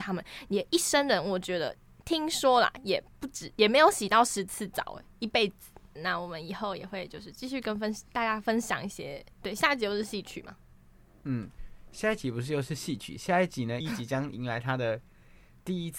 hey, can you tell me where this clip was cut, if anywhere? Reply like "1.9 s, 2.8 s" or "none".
6.0 s, 13.8 s